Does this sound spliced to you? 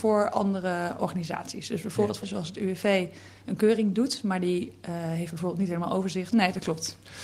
yes; 2 cuts; at 2.2 s, 6.3 s

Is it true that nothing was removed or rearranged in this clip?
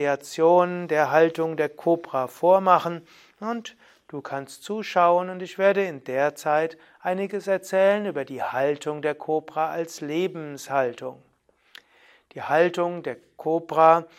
yes; 0 cuts

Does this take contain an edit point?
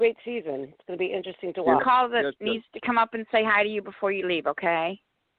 yes; 1 cut; at 1.8 s

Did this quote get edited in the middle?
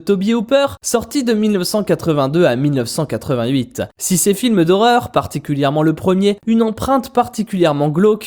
yes; 1 cut; at 6.4 s

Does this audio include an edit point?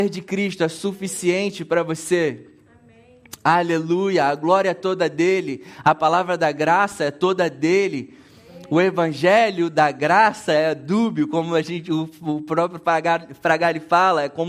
no; 0 cuts

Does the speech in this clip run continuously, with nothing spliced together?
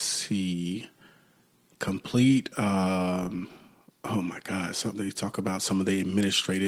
no; 1 cut; at 4.9 s

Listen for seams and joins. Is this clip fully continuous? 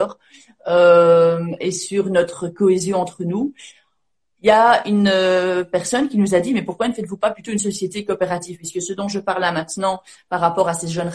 yes; 0 cuts

